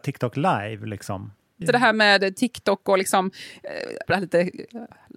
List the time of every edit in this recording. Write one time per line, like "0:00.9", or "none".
0:01.6
0:04.1